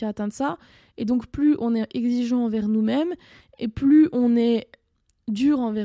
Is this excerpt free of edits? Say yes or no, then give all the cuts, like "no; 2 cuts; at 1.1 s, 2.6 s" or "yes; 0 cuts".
yes; 0 cuts